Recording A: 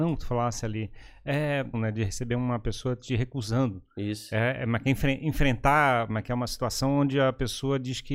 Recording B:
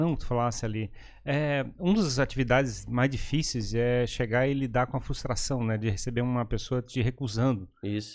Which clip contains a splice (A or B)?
A